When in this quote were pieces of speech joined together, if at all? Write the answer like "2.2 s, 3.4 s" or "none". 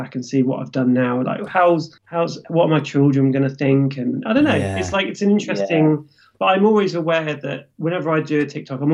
2.0 s

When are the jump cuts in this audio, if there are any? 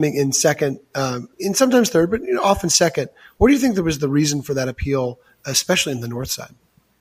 1.3 s

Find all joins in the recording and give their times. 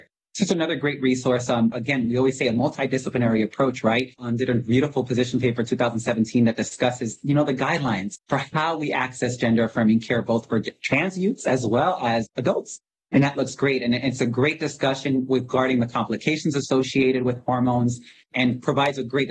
1.7 s, 4.2 s

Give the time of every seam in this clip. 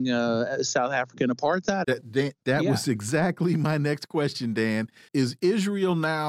1.8 s, 5.1 s

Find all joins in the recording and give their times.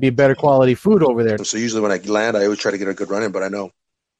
1.4 s

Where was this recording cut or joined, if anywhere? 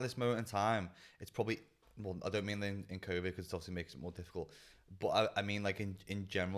none

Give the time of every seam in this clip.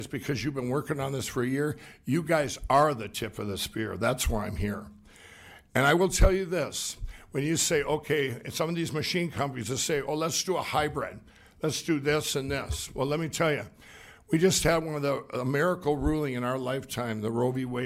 none

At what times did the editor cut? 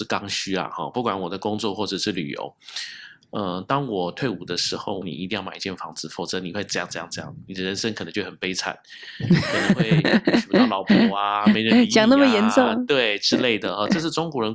3.2 s, 5.0 s

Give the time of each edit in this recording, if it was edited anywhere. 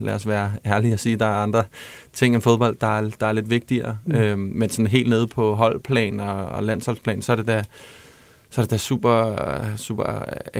none

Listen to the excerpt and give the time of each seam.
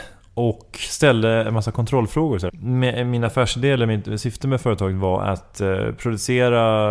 2.5 s

